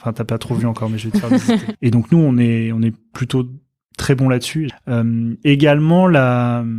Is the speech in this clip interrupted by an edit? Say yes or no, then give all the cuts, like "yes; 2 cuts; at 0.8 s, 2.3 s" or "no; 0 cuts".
yes; 2 cuts; at 1.7 s, 4.7 s